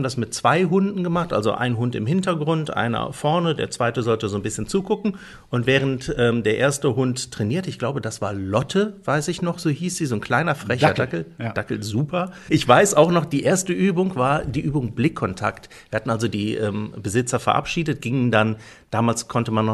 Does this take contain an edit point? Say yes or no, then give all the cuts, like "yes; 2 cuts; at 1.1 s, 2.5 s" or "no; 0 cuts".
yes; 1 cut; at 12.5 s